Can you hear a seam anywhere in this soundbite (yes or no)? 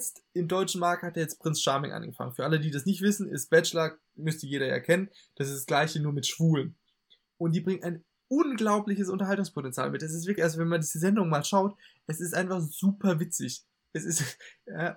no